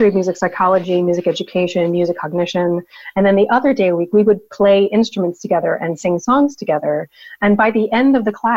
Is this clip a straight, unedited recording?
yes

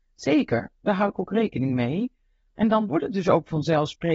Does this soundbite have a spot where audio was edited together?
yes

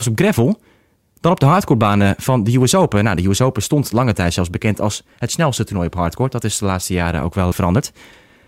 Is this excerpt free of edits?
no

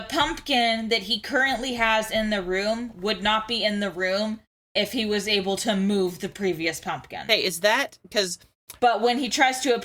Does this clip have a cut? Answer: yes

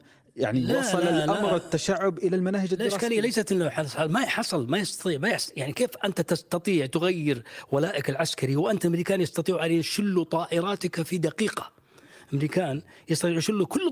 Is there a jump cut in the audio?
no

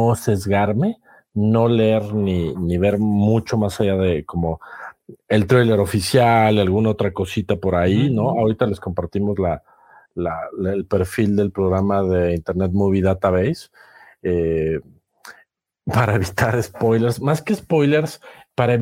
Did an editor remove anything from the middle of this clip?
no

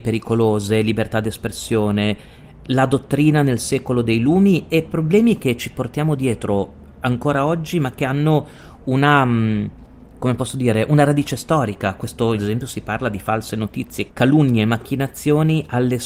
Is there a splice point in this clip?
yes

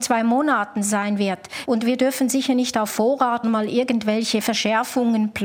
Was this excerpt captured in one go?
no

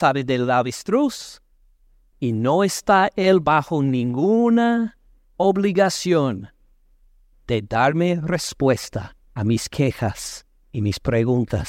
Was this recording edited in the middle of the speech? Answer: yes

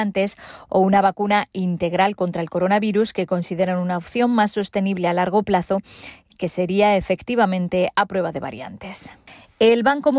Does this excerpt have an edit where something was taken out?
no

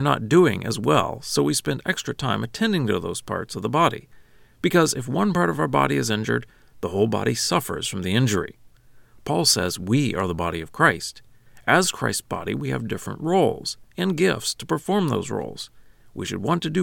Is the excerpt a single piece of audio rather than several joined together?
yes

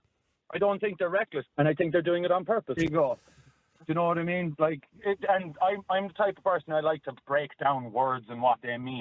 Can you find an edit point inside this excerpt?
yes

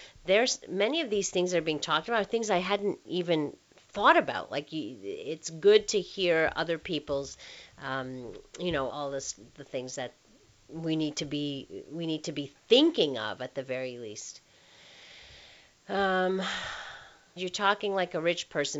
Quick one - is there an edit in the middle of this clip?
yes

